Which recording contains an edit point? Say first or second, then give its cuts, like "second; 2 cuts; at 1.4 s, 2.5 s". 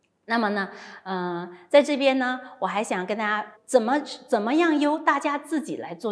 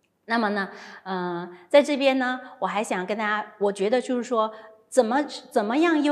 first; 1 cut; at 3.6 s